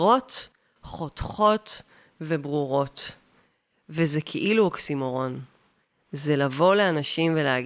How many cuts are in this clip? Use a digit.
1